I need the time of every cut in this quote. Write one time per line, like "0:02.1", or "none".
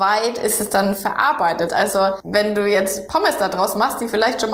0:01.7